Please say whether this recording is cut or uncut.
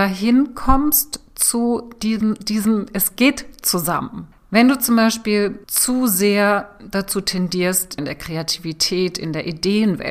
cut